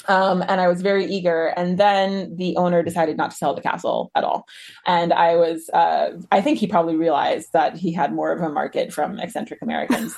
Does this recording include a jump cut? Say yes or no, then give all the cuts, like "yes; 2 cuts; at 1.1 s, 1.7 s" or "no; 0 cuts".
no; 0 cuts